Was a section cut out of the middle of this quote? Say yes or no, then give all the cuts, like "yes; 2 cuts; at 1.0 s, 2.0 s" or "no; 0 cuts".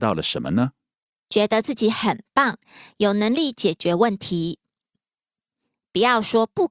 yes; 1 cut; at 1.2 s